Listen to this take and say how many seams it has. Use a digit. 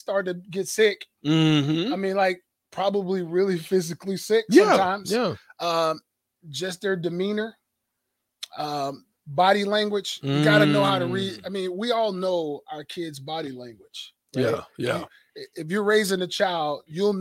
0